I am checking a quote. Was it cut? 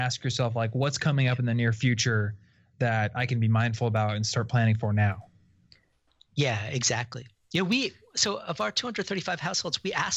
no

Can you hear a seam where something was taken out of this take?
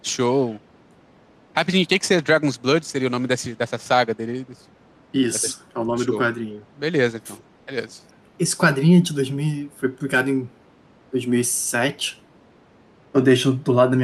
yes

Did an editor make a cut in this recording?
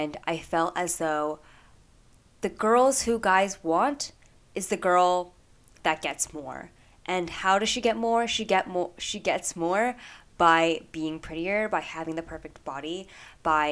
no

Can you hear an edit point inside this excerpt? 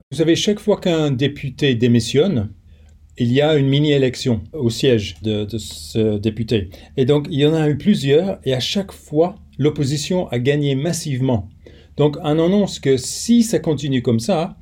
yes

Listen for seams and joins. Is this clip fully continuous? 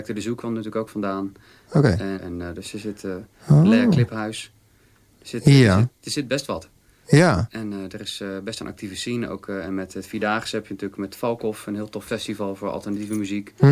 no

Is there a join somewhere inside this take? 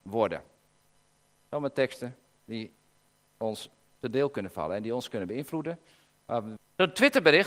yes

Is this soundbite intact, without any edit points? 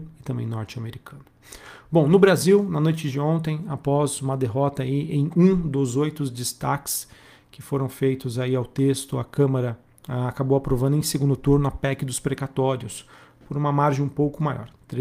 yes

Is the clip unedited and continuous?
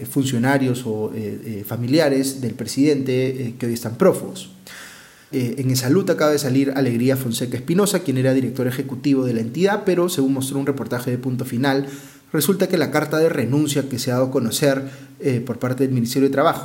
no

